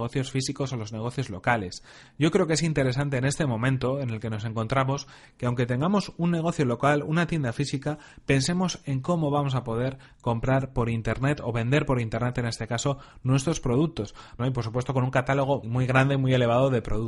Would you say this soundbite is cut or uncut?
cut